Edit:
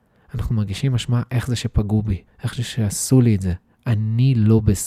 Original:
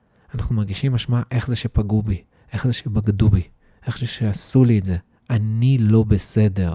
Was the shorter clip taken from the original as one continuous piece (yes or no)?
no